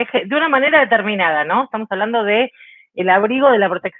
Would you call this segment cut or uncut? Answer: uncut